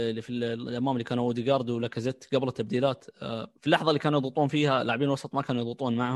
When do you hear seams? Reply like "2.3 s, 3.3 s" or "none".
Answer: 3.6 s